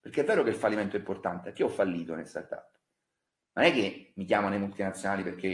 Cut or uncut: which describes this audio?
uncut